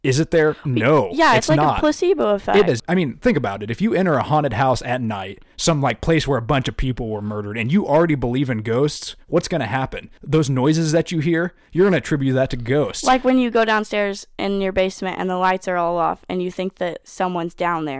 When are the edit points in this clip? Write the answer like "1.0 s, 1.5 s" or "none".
2.7 s